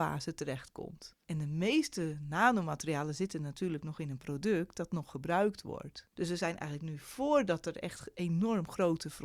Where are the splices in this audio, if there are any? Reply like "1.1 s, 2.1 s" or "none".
1.2 s, 6.1 s